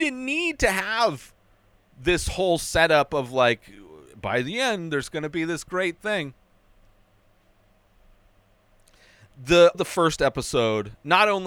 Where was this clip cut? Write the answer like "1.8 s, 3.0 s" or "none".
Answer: 9.7 s